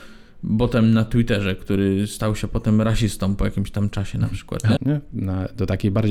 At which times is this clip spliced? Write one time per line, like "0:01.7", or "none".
0:04.8